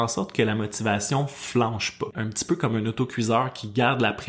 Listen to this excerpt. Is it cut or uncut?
cut